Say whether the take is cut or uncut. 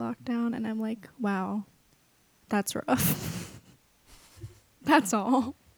uncut